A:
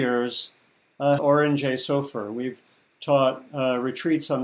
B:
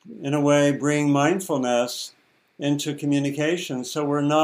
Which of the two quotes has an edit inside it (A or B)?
A